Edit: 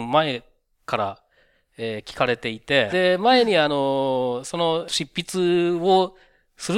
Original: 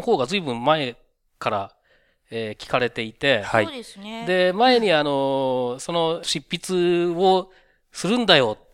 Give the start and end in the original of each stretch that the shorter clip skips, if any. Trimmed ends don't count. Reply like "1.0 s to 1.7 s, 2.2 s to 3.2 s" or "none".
3.4 s to 4.2 s